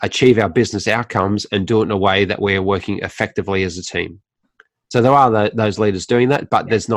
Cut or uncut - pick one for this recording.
uncut